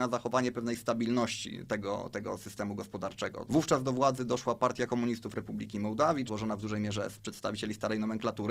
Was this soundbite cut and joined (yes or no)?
yes